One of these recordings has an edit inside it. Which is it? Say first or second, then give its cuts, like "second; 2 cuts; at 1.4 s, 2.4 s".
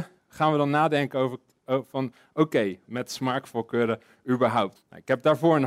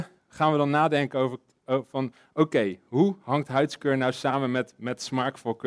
first; 2 cuts; at 2.8 s, 4.8 s